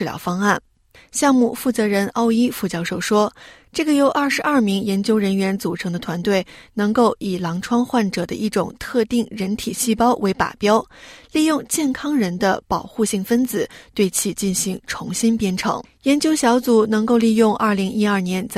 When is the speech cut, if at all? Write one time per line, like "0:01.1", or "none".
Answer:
0:01.0
0:15.8